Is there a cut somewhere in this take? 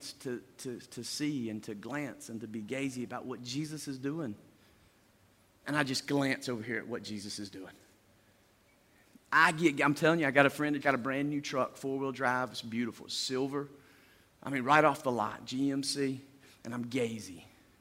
yes; 2 cuts; at 5.6 s, 10.8 s

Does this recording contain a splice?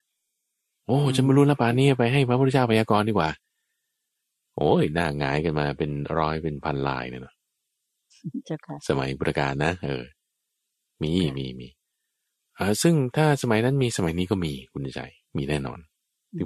no; 0 cuts

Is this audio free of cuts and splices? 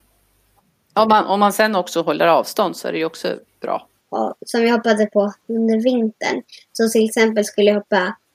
no; 1 cut; at 4.0 s

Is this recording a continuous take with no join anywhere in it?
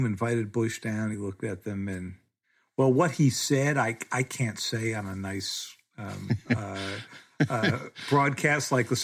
yes; 0 cuts

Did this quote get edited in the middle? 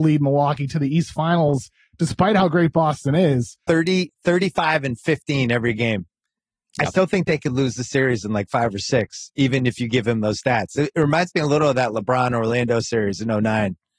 yes; 1 cut; at 3.7 s

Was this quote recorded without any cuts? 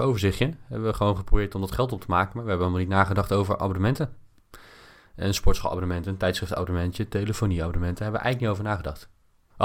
yes; 0 cuts

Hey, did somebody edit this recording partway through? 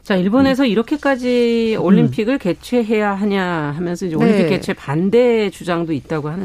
no; 0 cuts

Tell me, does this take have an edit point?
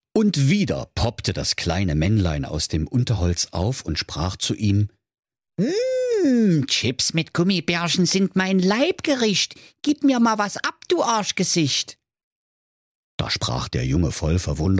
no; 0 cuts

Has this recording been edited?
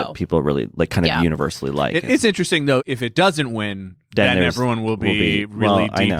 no; 0 cuts

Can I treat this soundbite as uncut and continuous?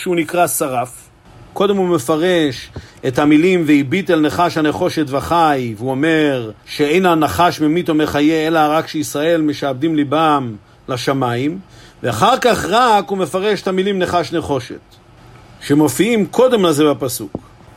no; 2 cuts; at 1.5 s, 6.6 s

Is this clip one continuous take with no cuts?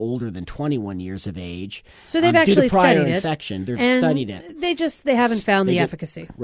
yes; 0 cuts

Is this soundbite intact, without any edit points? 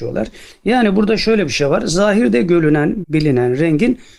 no; 1 cut; at 3.0 s

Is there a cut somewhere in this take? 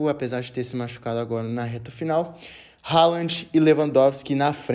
no; 0 cuts

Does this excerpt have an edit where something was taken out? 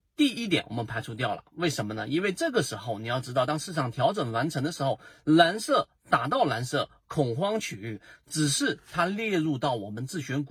no; 0 cuts

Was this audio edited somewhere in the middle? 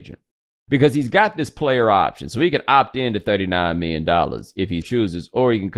yes; 1 cut; at 4.8 s

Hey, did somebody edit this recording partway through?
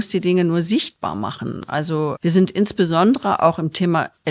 yes; 1 cut; at 2.2 s

